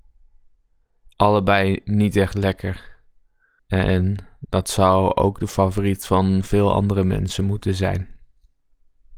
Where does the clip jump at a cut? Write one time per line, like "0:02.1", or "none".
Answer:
0:03.6